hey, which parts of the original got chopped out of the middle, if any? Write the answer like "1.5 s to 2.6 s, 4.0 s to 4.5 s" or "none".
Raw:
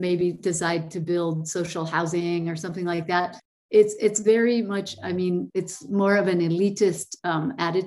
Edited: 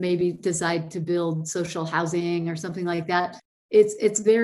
none